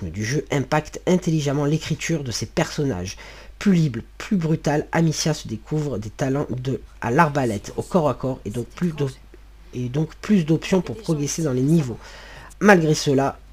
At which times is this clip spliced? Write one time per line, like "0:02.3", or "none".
0:12.5

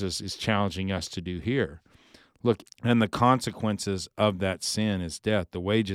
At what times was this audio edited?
0:02.7

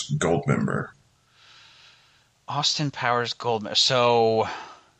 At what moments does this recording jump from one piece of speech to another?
none

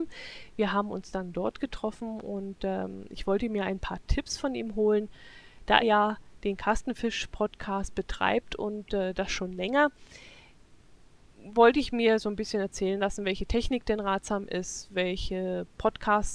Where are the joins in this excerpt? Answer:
0:05.8

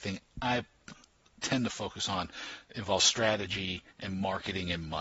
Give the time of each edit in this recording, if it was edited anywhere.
0:03.9

